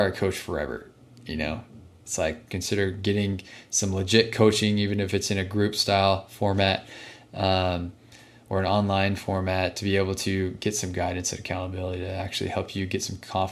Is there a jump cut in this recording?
yes; 1 cut; at 2.5 s

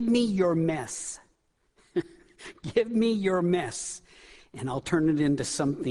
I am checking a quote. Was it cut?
no; 0 cuts

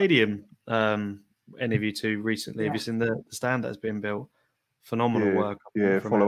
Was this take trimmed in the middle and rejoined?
no; 0 cuts

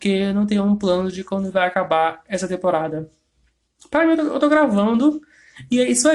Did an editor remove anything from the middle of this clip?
no; 0 cuts

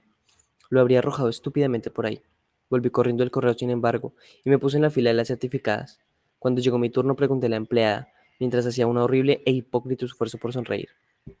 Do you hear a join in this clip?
no; 0 cuts

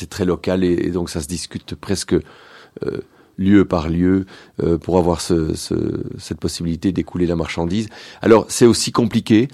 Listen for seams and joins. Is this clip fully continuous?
yes; 0 cuts

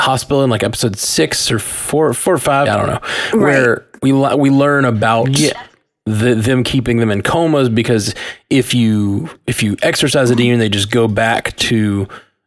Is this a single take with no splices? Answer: no; 1 cut; at 2.7 s

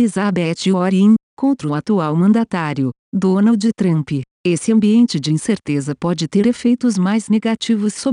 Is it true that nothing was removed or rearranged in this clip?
yes; 0 cuts

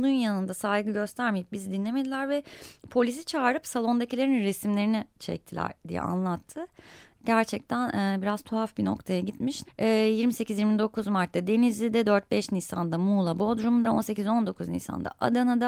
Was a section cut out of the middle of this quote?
yes; 2 cuts; at 9.6 s, 13.8 s

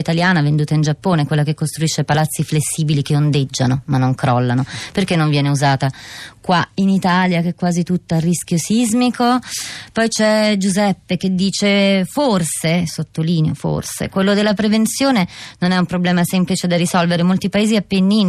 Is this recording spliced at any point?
no; 0 cuts

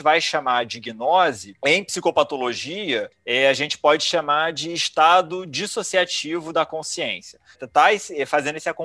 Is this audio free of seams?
no; 1 cut; at 7.5 s

